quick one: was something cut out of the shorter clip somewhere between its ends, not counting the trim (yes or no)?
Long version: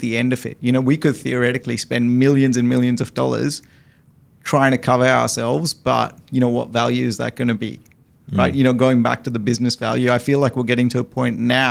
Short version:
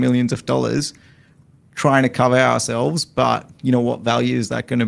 no